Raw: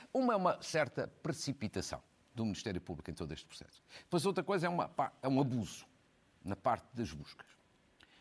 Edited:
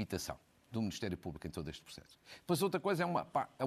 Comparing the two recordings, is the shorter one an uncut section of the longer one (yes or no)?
yes